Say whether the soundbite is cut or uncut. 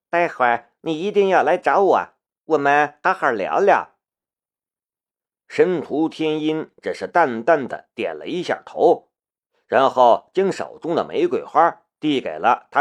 cut